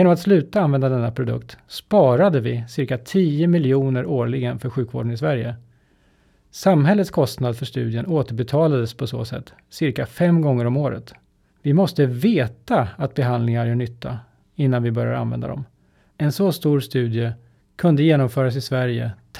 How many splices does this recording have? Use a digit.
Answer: 2